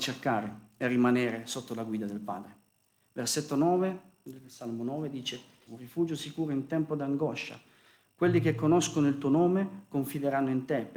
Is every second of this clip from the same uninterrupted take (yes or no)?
no